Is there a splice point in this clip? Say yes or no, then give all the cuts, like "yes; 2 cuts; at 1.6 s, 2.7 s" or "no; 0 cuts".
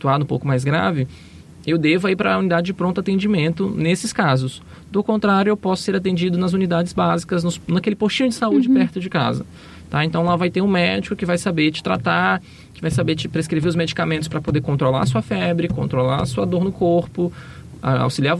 no; 0 cuts